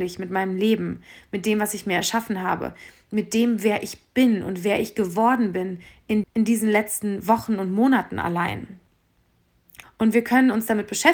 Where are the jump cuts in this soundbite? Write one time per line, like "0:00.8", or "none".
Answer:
0:06.2
0:09.8